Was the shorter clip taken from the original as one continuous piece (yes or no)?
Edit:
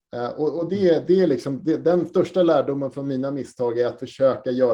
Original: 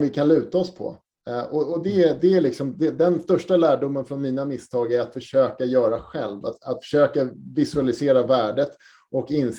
yes